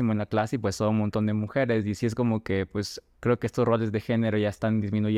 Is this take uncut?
yes; 0 cuts

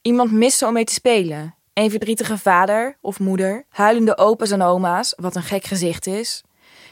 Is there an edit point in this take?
yes; 2 cuts; at 1.7 s, 3.7 s

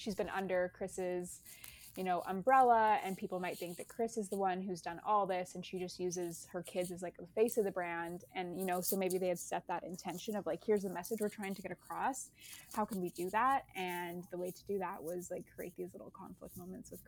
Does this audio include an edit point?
no; 0 cuts

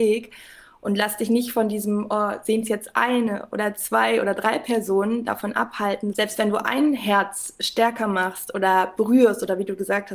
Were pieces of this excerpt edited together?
yes; 1 cut; at 6.1 s

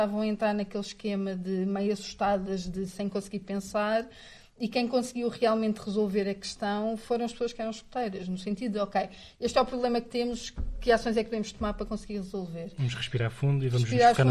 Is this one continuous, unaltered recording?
yes; 0 cuts

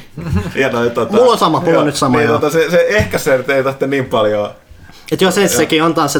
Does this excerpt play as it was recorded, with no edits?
yes; 0 cuts

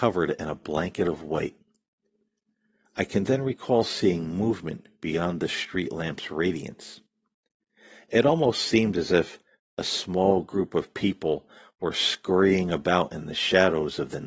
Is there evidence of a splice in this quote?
no; 0 cuts

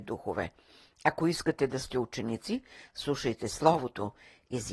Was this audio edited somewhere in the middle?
no; 0 cuts

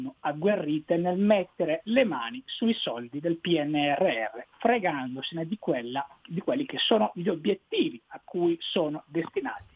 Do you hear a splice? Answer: no; 0 cuts

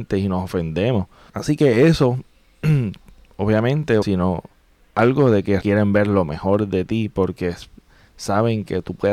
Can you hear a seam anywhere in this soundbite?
yes; 3 cuts; at 1.3 s, 4.0 s, 5.6 s

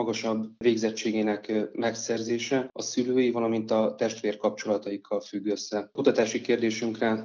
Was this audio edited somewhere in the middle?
no; 0 cuts

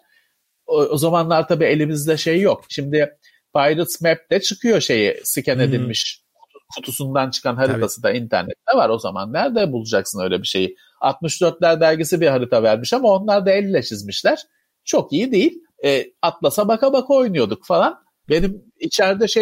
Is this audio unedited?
no; 2 cuts; at 15.7 s, 18.2 s

